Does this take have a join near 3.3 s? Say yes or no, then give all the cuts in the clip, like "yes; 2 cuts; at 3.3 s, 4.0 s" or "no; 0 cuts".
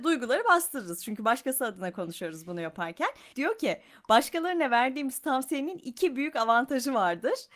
yes; 1 cut; at 3.3 s